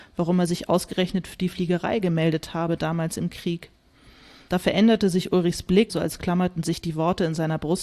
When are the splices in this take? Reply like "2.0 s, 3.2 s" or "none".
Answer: 5.9 s